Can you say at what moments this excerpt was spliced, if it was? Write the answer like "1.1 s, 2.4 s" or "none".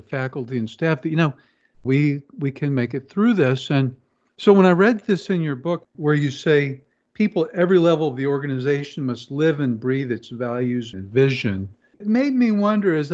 1.9 s, 10.9 s

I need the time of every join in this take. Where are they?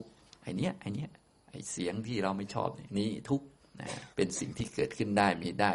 4.1 s

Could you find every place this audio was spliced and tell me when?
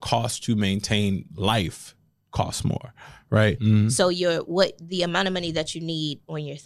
3.6 s

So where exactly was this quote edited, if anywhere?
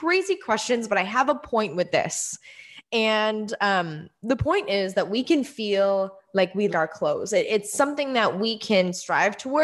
6.7 s

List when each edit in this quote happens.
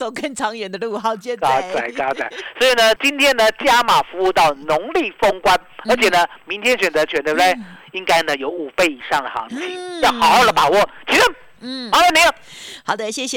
3.0 s

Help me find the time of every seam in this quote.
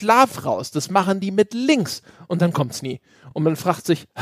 none

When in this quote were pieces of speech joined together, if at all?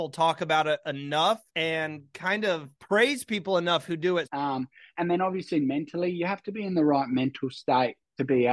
1.5 s, 2.8 s, 4.3 s

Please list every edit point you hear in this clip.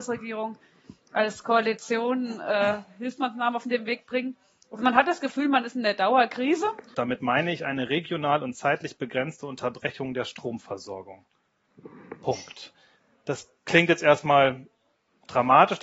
6.9 s

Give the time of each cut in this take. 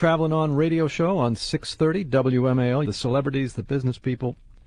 2.8 s

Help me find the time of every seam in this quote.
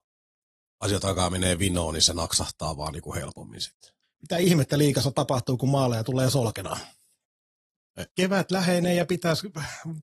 4.0 s, 8.1 s

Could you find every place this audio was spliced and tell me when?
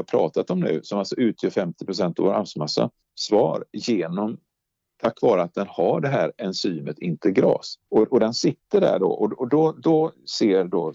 3.0 s, 7.9 s

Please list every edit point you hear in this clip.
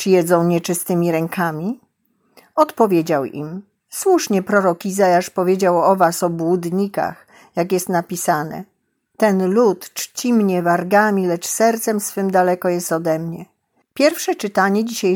13.8 s

